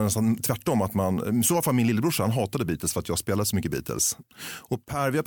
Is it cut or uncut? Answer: cut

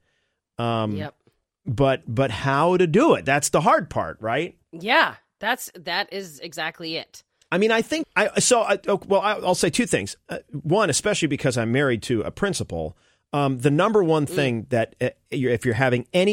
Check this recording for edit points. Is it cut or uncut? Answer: cut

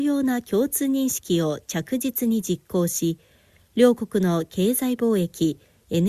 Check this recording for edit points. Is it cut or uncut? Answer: uncut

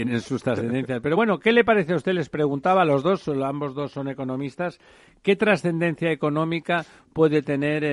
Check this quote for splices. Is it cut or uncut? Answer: uncut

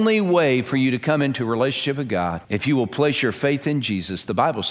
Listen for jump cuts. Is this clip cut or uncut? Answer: cut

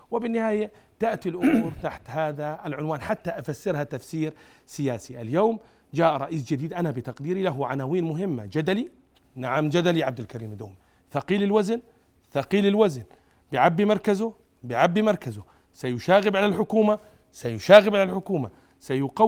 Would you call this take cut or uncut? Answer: uncut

